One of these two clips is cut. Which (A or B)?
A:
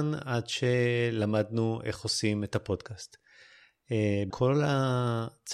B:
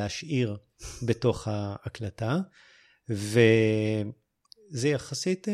A